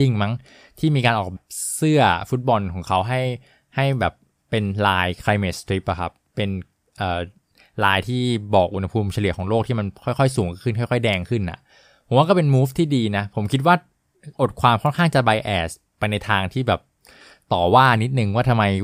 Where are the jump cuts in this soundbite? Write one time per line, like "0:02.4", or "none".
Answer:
0:01.4

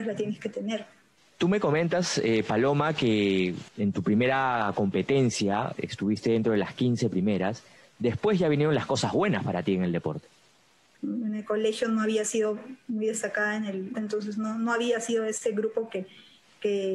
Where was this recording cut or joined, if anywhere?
0:11.0
0:13.9

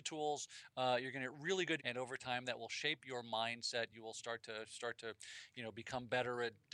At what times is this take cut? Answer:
0:01.8

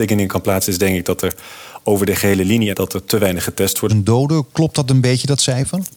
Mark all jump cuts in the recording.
0:02.7
0:03.9

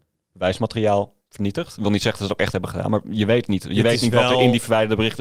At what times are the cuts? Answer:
none

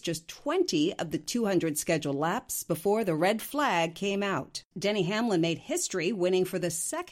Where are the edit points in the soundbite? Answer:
0:04.7

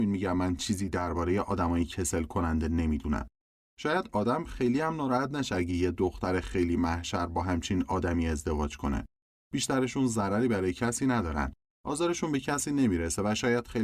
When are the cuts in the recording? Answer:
none

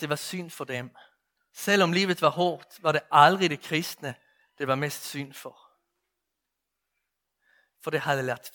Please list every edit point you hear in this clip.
0:01.4

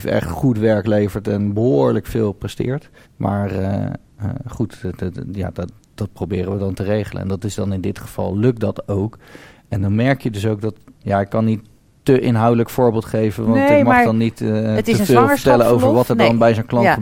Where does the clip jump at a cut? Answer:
0:03.0

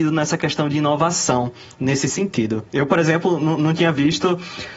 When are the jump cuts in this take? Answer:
none

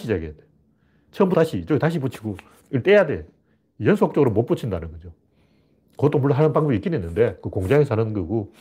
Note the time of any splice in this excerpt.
none

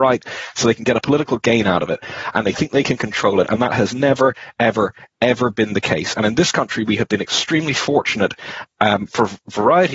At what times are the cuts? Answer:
none

